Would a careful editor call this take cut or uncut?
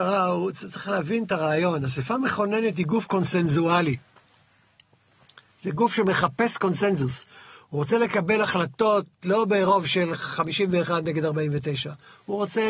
uncut